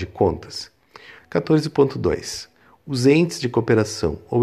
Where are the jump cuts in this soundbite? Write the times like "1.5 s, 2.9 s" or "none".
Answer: 1.2 s

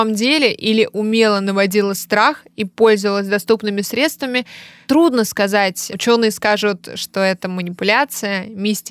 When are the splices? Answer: none

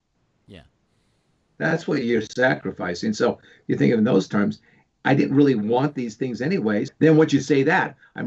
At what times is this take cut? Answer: 6.9 s

